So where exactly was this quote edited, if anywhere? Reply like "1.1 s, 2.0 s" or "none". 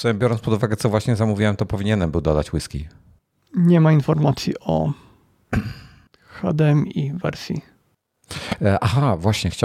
none